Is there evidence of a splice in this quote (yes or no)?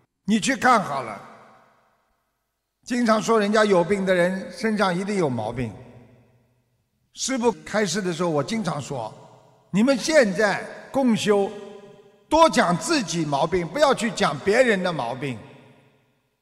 no